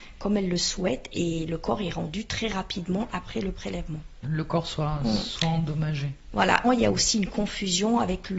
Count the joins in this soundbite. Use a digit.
2